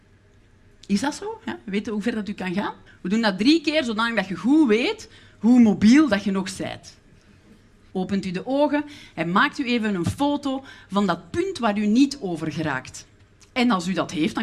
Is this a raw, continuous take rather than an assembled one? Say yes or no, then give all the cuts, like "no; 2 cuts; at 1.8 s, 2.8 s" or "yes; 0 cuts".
no; 2 cuts; at 2.9 s, 7.9 s